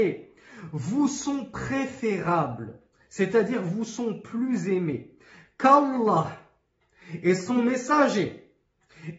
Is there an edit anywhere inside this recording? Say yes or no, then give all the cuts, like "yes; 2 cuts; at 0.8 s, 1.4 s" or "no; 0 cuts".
no; 0 cuts